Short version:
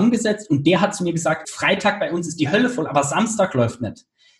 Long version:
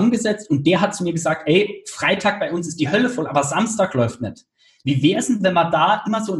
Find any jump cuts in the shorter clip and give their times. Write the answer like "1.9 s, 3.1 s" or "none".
1.4 s